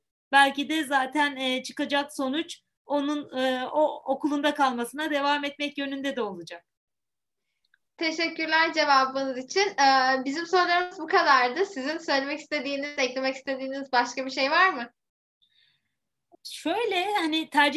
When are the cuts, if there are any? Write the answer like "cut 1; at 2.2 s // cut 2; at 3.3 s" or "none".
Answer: cut 1; at 16.3 s